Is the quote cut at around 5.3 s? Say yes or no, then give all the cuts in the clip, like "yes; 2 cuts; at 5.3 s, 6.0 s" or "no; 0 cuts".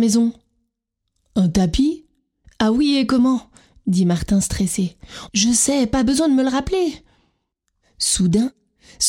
yes; 2 cuts; at 2.4 s, 5.3 s